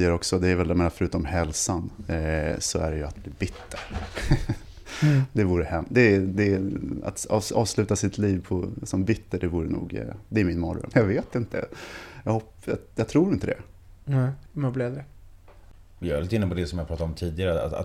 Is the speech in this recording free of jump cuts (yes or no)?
no